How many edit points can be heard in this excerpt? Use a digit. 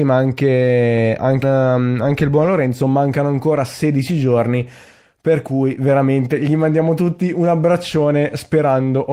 1